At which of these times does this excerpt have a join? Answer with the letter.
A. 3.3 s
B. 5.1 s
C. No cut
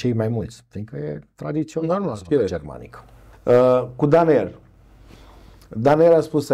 A